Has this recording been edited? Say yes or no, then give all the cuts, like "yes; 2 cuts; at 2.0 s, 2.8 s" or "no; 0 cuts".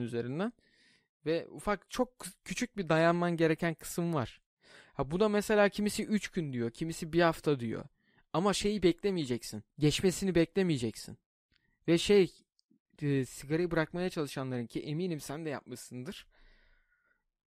yes; 1 cut; at 9.7 s